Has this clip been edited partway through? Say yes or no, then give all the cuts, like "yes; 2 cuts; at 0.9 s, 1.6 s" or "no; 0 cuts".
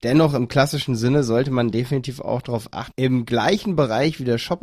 yes; 1 cut; at 2.9 s